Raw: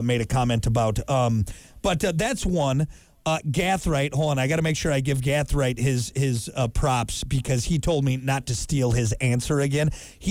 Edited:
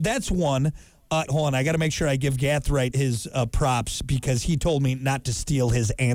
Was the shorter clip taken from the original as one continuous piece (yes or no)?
no